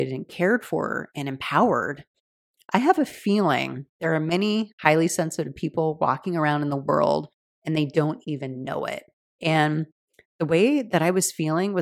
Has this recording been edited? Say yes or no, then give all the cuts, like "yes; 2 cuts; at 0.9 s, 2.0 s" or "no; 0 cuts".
yes; 1 cut; at 9.2 s